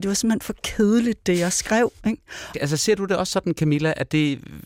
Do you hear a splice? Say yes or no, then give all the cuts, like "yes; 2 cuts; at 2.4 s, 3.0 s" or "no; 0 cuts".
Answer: yes; 1 cut; at 2.5 s